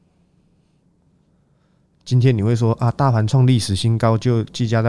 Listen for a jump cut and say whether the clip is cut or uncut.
uncut